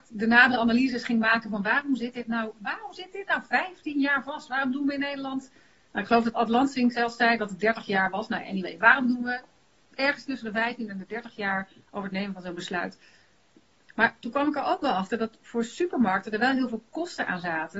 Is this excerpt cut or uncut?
uncut